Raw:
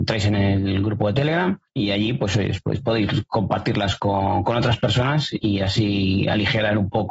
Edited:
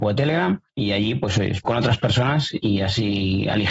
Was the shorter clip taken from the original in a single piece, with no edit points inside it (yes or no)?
no